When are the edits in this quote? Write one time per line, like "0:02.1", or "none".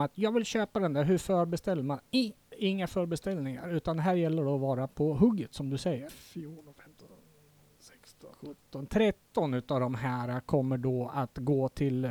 0:06.1
0:08.3